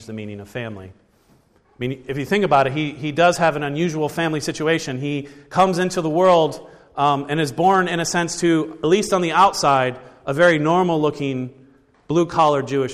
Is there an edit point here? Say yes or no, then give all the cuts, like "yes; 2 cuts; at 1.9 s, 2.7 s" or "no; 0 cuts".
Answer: no; 0 cuts